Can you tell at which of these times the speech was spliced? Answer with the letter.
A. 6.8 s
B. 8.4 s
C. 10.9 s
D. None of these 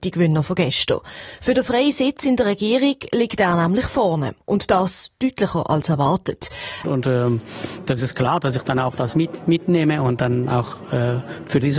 A